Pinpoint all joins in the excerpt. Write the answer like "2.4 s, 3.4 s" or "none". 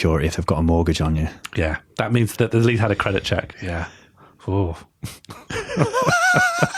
2.4 s, 3.5 s